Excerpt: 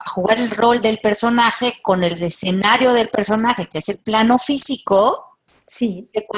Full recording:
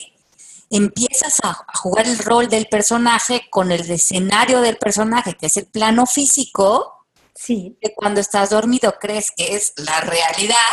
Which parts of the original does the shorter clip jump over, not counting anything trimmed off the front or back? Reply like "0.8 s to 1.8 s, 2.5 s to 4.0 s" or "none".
none